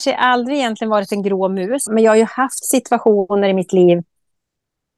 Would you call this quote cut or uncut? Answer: cut